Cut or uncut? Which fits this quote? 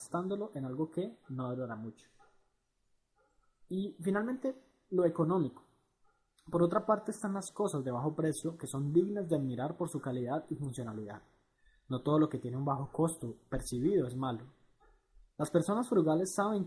uncut